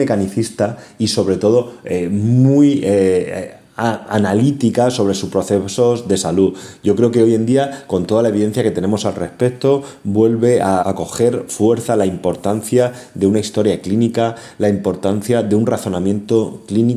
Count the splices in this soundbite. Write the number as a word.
one